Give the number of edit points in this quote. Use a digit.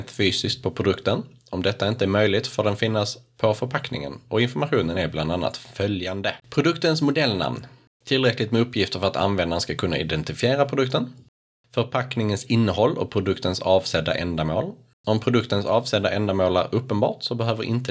1